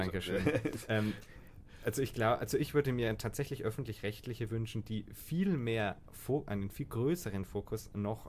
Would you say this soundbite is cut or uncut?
uncut